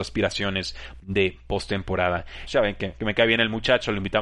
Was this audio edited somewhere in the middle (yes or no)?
yes